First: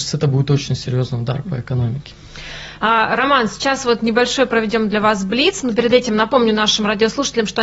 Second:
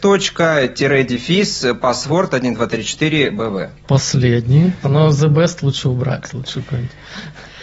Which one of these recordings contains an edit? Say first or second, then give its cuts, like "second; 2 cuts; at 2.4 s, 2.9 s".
second; 2 cuts; at 3.8 s, 4.8 s